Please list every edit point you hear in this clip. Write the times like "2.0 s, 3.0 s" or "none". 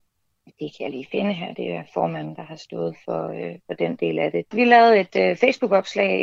4.5 s